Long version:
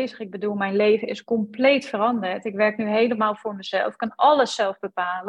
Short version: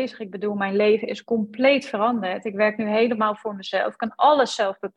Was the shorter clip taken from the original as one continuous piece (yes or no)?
yes